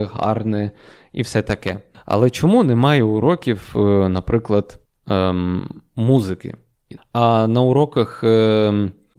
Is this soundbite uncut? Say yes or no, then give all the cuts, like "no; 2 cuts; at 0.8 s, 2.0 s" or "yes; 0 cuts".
no; 2 cuts; at 1.9 s, 7.0 s